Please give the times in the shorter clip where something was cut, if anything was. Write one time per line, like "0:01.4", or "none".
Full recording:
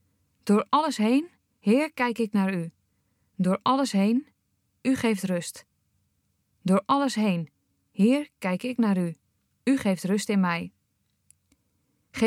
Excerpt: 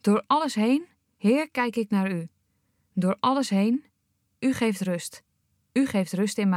0:05.6